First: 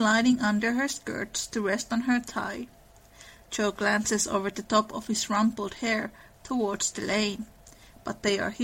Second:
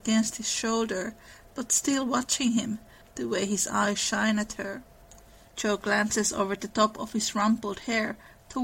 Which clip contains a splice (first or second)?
second